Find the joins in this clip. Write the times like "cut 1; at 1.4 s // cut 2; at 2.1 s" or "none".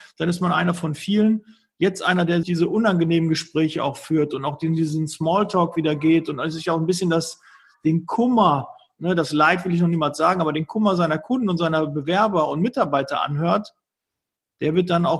cut 1; at 2.4 s